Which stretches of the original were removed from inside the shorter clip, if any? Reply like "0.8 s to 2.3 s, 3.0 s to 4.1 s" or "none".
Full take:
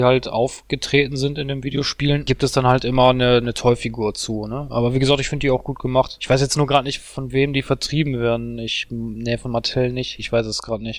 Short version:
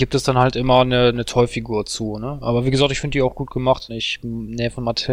6.2 s to 8.6 s